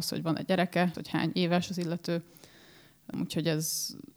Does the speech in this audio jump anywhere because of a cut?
yes; 1 cut; at 0.9 s

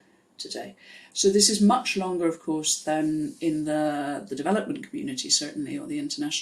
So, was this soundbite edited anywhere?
no; 0 cuts

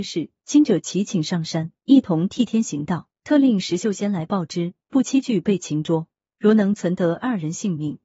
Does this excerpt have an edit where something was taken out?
yes; 1 cut; at 3.2 s

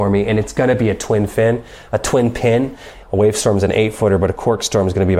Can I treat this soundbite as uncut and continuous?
no; 1 cut; at 3.0 s

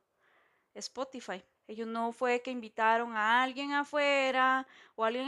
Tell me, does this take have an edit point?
yes; 1 cut; at 1.5 s

